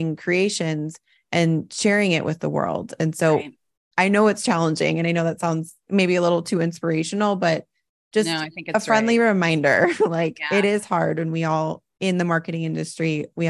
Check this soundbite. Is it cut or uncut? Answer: uncut